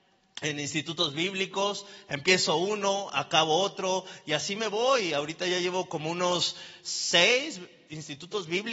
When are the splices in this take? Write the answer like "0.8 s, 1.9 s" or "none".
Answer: none